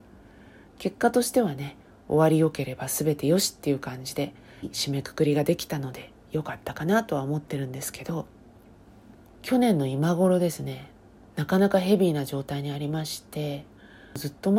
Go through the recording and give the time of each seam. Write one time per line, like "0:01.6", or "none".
0:04.6